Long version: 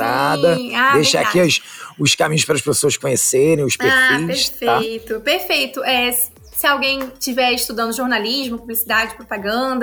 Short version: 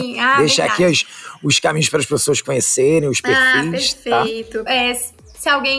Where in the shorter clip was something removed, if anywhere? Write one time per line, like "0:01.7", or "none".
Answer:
0:04.7